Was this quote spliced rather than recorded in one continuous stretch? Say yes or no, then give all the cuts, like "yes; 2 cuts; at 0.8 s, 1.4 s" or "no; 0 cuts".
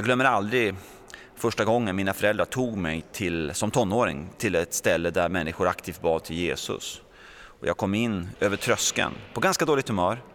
yes; 2 cuts; at 4.3 s, 8.3 s